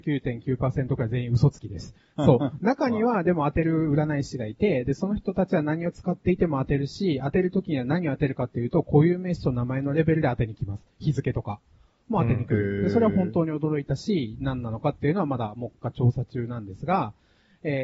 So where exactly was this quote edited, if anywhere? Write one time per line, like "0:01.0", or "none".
0:02.2